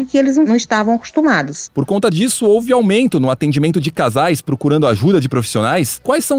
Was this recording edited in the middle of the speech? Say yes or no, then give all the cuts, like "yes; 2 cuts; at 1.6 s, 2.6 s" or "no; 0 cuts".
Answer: yes; 1 cut; at 1.7 s